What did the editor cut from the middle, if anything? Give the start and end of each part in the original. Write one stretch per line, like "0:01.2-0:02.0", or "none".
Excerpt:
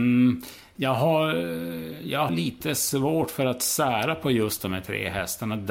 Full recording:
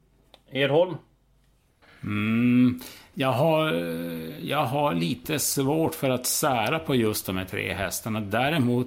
0:04.7-0:04.9